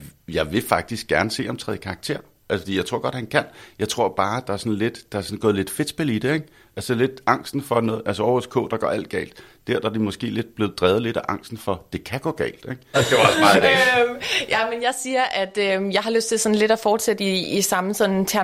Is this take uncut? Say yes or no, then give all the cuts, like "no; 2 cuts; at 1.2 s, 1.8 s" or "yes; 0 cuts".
no; 1 cut; at 12.9 s